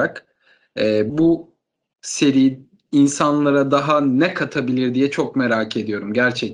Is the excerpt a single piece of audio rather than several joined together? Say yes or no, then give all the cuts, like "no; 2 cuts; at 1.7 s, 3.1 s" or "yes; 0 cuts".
no; 1 cut; at 1.1 s